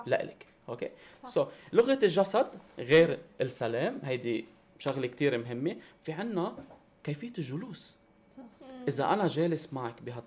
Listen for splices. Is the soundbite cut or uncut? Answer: uncut